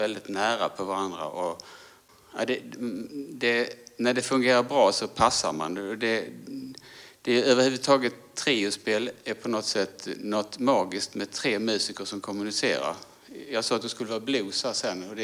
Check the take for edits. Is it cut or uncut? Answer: uncut